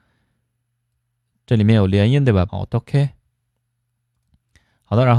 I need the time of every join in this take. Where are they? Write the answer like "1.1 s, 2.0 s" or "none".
2.5 s